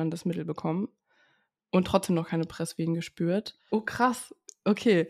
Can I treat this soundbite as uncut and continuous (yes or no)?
no